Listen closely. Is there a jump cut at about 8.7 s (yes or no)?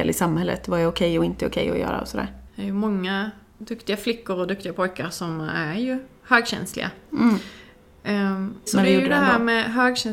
yes